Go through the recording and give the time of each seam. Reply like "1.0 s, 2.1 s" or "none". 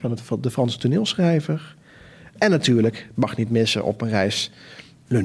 none